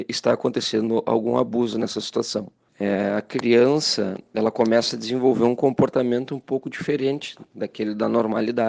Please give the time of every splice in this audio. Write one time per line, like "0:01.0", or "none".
0:02.7